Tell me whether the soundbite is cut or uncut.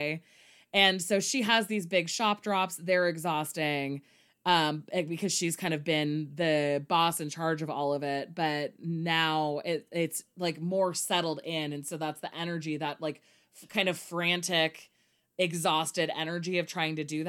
uncut